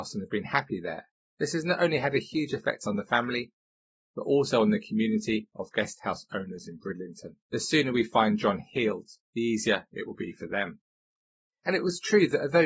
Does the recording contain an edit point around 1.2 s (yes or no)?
yes